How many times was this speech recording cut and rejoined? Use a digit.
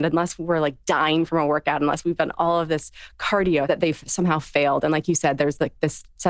1